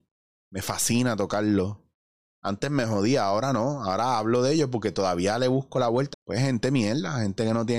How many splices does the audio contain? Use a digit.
1